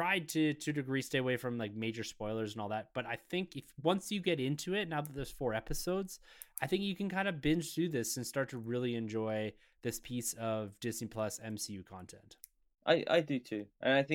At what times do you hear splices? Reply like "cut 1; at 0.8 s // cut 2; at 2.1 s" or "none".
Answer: none